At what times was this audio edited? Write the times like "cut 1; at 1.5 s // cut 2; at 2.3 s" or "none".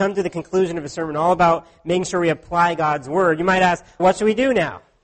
cut 1; at 4.0 s